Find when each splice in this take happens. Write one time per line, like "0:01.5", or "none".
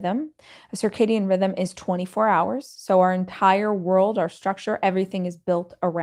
none